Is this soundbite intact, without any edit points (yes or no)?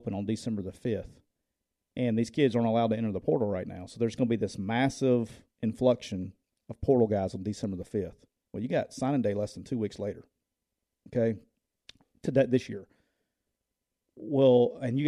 yes